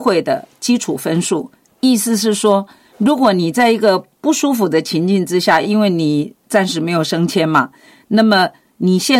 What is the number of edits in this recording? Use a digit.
0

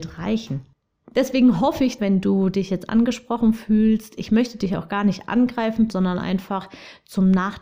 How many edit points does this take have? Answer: 2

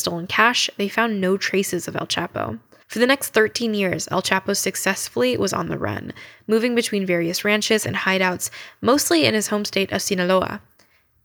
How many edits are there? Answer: 2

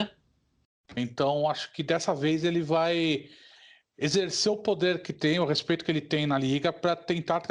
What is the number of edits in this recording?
1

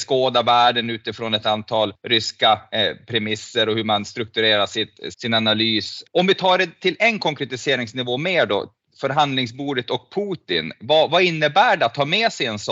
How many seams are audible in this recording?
1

